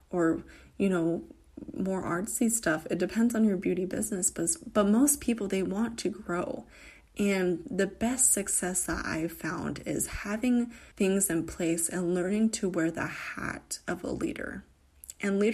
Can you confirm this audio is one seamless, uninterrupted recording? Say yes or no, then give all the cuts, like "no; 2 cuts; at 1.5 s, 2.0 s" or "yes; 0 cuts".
no; 1 cut; at 10.9 s